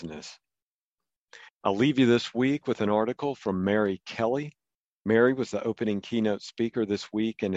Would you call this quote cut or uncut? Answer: cut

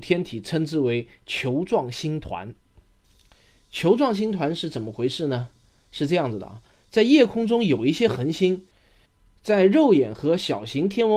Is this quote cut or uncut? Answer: uncut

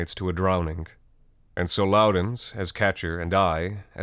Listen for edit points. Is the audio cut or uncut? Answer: uncut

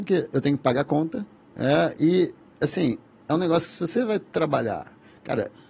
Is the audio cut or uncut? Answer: cut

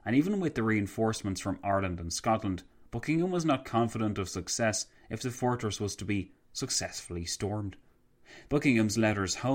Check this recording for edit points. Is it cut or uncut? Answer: cut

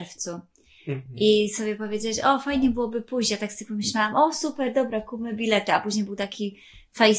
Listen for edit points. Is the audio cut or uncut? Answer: uncut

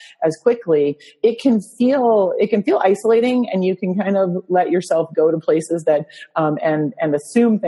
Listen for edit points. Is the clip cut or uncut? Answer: uncut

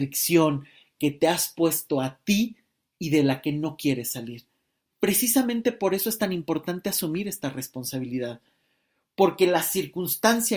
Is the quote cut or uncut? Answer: uncut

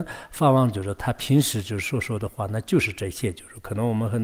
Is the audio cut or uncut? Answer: uncut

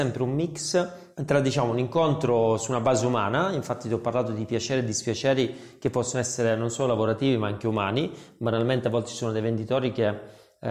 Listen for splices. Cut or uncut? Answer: cut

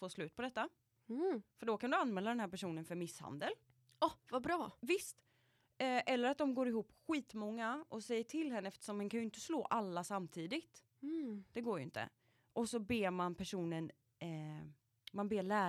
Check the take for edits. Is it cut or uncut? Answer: uncut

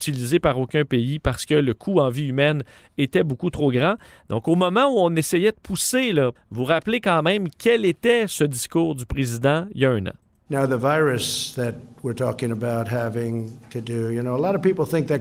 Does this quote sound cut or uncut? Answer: cut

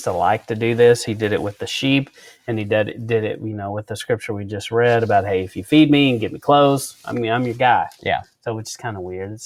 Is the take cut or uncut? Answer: uncut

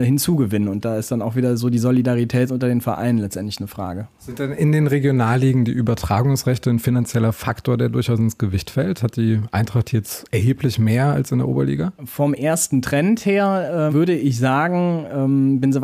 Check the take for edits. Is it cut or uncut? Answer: cut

